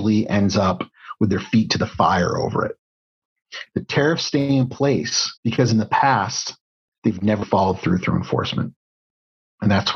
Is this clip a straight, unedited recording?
no; 3 cuts; at 3.7 s, 5.4 s, 7.4 s

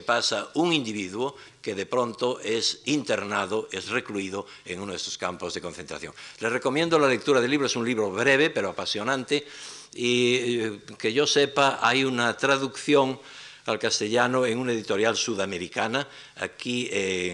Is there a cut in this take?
no; 0 cuts

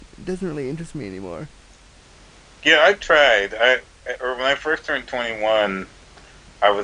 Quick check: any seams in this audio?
no; 0 cuts

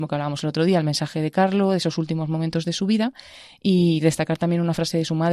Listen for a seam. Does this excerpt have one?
no; 0 cuts

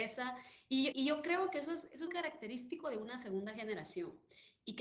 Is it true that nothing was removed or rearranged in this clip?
no; 2 cuts; at 0.9 s, 2.1 s

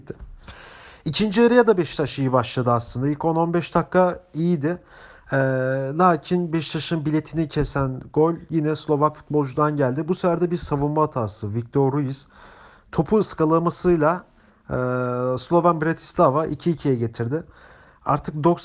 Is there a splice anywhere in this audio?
no; 0 cuts

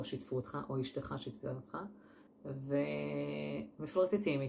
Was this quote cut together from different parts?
yes; 1 cut; at 2.3 s

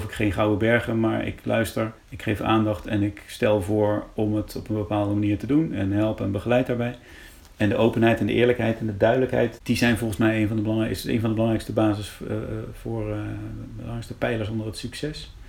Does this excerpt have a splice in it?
yes; 1 cut; at 2.0 s

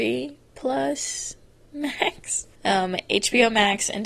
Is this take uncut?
no; 1 cut; at 2.6 s

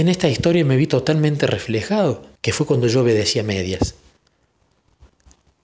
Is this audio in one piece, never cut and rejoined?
no; 1 cut; at 2.4 s

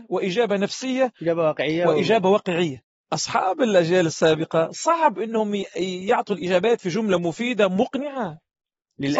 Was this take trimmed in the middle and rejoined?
no; 0 cuts

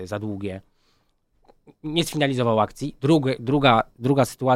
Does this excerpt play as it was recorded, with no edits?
yes; 0 cuts

